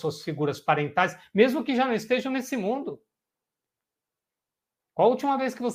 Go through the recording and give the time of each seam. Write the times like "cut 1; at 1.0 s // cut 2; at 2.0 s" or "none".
none